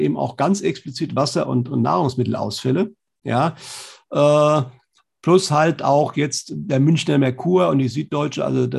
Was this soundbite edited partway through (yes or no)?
no